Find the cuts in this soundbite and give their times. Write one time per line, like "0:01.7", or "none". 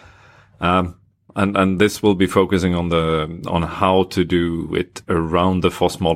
0:01.3